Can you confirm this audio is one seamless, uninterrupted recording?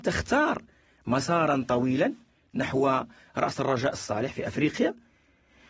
yes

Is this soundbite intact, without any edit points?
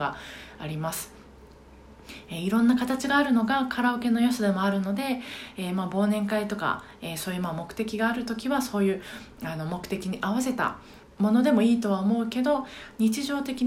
no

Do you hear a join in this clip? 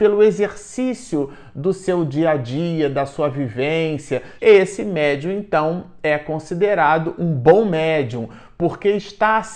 yes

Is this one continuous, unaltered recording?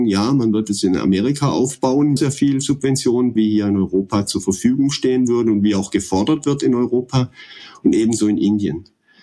no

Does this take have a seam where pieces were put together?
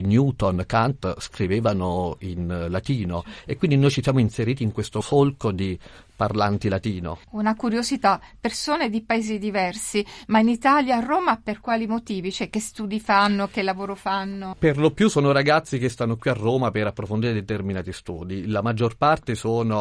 no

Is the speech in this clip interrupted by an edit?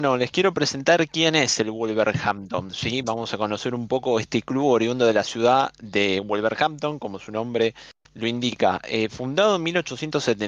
no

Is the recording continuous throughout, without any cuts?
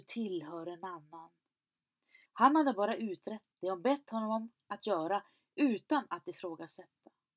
no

